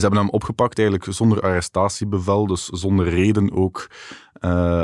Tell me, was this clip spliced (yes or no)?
no